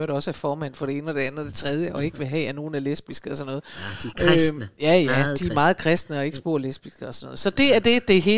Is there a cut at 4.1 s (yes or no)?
no